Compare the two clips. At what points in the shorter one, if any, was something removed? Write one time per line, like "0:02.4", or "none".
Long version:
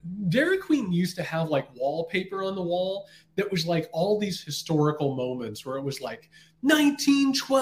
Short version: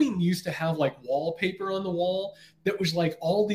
none

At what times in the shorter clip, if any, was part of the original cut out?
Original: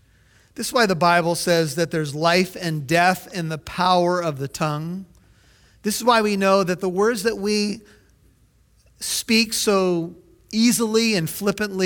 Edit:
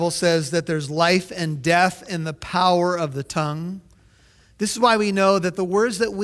none

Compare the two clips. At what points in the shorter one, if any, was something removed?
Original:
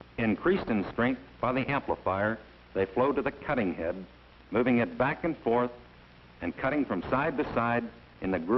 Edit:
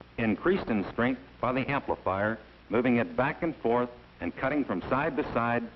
0:02.6
0:04.1

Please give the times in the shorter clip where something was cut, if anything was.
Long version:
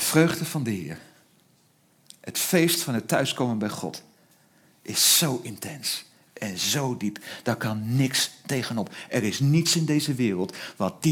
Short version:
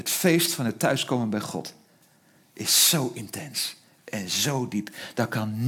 none

